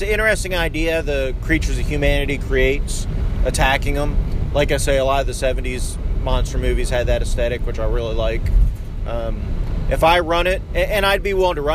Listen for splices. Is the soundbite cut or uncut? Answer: uncut